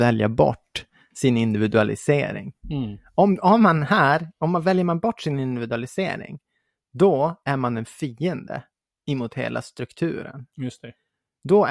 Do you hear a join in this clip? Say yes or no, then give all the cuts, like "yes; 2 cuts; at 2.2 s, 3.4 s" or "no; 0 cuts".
no; 0 cuts